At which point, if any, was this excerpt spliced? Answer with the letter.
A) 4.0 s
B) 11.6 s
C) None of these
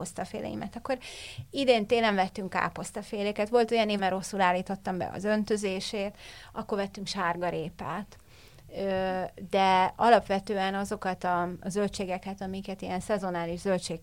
A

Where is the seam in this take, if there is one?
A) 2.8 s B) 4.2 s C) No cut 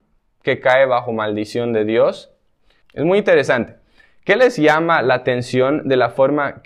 A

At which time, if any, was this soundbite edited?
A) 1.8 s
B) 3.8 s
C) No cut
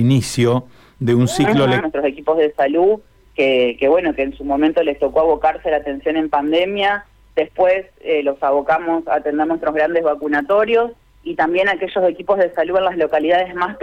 A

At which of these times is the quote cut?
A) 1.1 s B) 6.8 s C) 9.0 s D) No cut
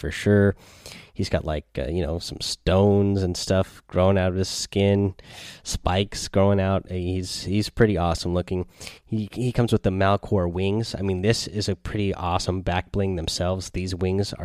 D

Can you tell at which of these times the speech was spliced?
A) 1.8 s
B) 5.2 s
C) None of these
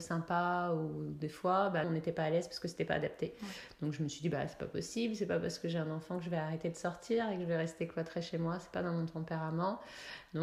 A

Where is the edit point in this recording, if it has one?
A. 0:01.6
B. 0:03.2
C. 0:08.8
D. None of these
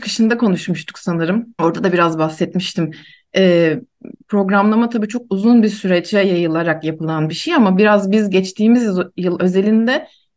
A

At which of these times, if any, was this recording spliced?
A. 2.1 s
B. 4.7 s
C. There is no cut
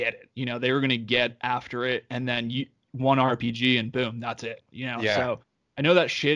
B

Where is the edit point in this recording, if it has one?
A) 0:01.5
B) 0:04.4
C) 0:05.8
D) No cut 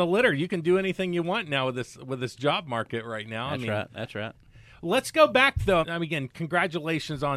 C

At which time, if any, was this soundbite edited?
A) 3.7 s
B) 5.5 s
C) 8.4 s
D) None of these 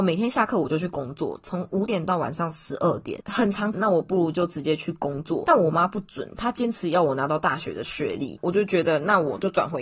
A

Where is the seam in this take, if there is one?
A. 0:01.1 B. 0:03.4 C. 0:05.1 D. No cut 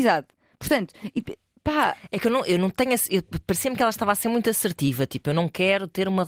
D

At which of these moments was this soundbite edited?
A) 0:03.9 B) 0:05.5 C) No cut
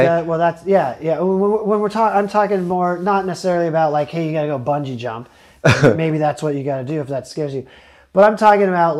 C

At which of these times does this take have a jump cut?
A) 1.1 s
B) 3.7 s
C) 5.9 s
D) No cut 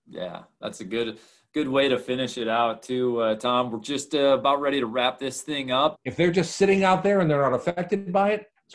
C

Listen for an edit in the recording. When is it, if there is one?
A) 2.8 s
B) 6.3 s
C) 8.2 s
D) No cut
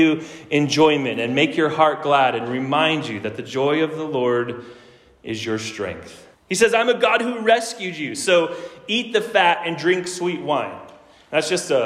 B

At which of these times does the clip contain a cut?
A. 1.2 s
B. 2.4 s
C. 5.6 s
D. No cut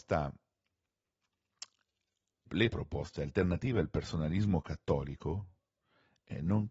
B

